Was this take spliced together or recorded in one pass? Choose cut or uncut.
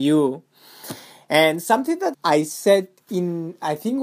cut